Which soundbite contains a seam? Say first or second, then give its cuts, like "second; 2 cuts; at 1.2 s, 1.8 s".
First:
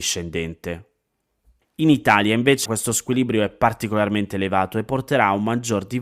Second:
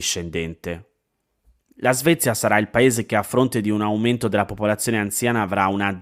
first; 2 cuts; at 1.6 s, 2.7 s